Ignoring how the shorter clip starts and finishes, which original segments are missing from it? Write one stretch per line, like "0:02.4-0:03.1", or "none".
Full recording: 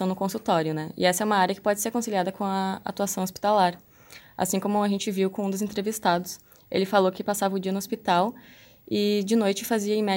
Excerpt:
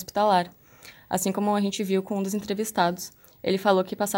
none